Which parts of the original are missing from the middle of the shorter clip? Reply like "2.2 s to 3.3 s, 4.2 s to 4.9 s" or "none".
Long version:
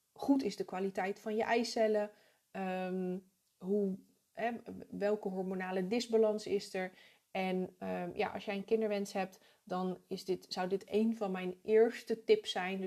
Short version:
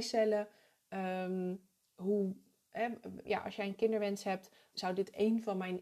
4.9 s to 8.1 s, 9.6 s to 10.5 s